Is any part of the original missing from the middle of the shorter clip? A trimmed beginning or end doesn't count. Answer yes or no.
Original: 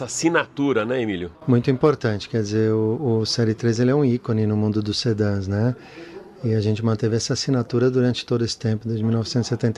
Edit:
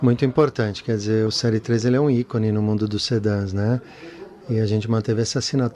yes